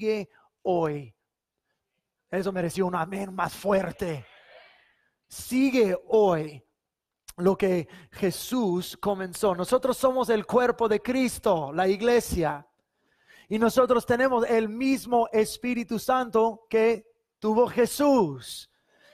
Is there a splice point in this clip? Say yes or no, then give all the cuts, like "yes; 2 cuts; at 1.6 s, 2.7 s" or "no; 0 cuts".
no; 0 cuts